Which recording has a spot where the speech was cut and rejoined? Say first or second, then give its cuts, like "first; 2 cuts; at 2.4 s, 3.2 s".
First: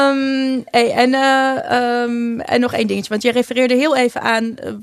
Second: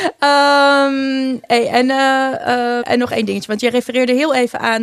second; 1 cut; at 2.8 s